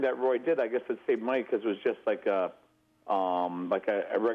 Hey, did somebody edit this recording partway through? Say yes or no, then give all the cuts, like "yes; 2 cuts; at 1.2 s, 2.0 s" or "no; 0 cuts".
no; 0 cuts